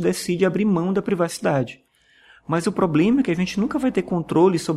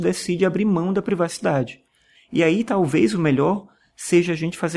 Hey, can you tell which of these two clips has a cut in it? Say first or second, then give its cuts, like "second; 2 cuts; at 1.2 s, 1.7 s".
second; 1 cut; at 2.2 s